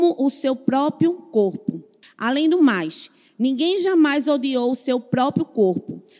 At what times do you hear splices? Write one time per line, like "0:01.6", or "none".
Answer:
0:02.0